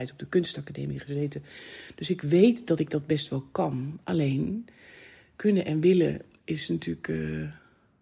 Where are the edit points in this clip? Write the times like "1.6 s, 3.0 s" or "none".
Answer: none